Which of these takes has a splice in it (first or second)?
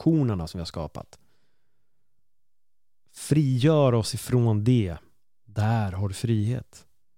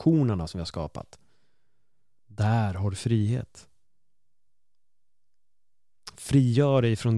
second